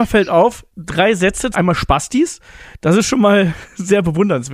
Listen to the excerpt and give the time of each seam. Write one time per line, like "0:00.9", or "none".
0:01.5